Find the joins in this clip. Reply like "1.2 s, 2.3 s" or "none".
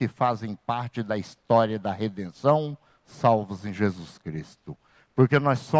none